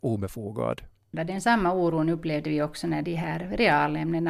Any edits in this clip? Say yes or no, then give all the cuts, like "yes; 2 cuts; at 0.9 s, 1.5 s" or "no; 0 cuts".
yes; 1 cut; at 3.0 s